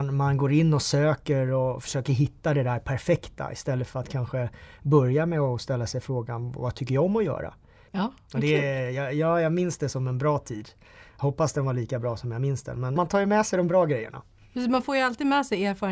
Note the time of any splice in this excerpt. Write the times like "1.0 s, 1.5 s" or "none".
7.9 s, 13.0 s